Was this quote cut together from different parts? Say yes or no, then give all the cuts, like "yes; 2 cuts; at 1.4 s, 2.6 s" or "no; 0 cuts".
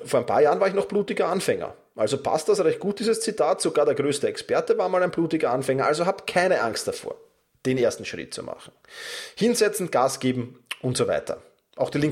no; 0 cuts